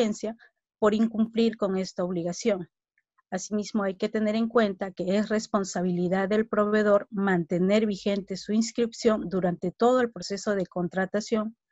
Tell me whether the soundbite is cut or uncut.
uncut